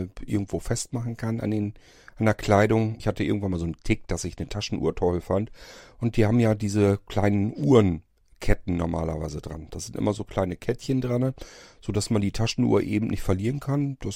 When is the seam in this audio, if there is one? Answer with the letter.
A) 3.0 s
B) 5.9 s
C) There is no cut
A